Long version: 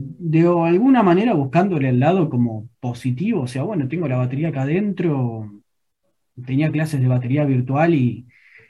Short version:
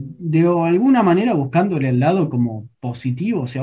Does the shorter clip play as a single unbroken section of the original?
yes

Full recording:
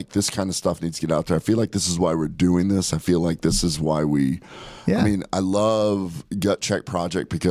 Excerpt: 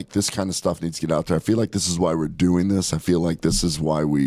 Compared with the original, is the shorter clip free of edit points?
yes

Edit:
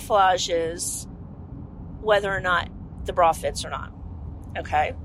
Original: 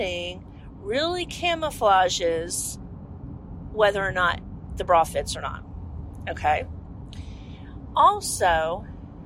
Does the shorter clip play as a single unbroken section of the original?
yes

